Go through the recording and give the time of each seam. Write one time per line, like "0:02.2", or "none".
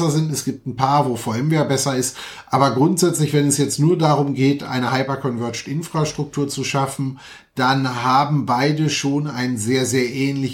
none